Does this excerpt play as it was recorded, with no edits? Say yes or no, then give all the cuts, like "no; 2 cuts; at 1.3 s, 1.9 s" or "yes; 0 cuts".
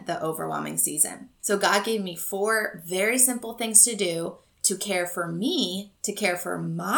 no; 1 cut; at 6.0 s